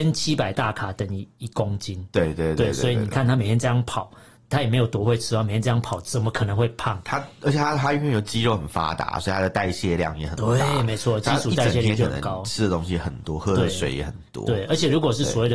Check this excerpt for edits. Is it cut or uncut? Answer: uncut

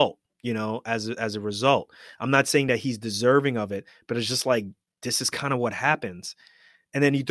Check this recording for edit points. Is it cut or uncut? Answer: uncut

